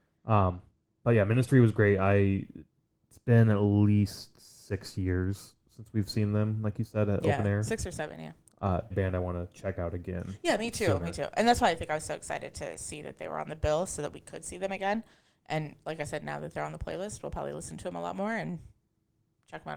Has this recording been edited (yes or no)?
yes